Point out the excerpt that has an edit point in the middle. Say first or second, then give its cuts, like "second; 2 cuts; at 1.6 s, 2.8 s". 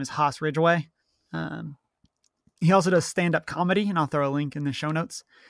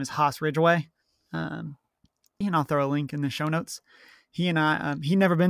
second; 1 cut; at 2.4 s